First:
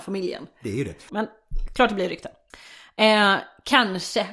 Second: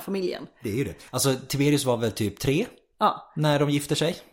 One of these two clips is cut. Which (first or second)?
first